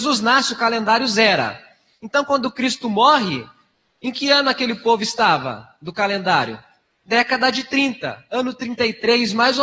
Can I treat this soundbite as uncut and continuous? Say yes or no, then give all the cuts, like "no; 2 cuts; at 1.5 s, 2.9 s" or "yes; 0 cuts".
yes; 0 cuts